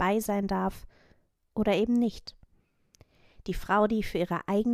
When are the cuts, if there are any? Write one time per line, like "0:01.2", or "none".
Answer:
none